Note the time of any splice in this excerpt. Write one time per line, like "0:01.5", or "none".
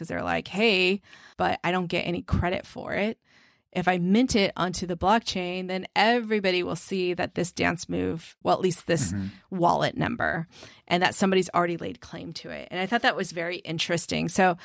0:01.3
0:08.4